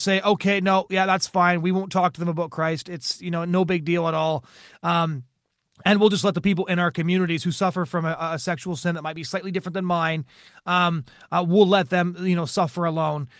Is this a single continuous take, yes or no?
yes